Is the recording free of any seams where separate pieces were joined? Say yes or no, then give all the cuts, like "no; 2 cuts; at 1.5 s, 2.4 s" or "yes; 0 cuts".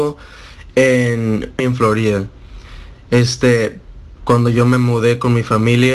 no; 2 cuts; at 1.6 s, 4.2 s